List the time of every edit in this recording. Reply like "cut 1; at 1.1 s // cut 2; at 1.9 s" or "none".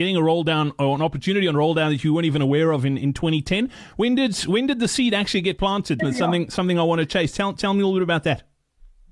cut 1; at 6.0 s

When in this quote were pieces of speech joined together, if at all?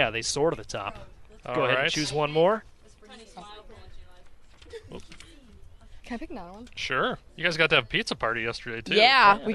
cut 1; at 6.0 s // cut 2; at 7.3 s

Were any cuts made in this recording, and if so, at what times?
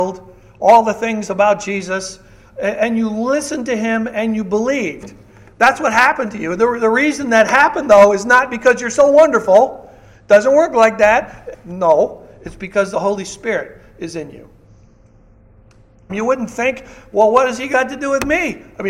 cut 1; at 11.5 s // cut 2; at 16.1 s

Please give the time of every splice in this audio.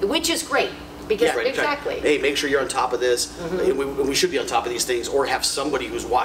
cut 1; at 1.3 s

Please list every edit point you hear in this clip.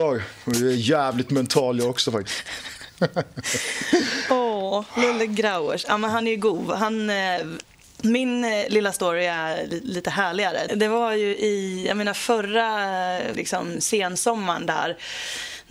cut 1; at 10.7 s // cut 2; at 13.4 s

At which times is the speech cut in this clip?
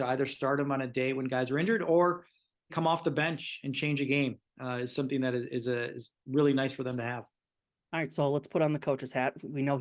cut 1; at 2.7 s

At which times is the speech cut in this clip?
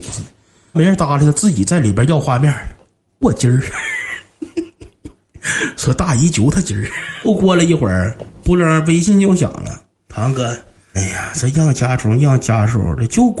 none

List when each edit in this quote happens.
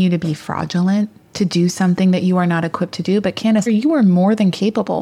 cut 1; at 3.7 s

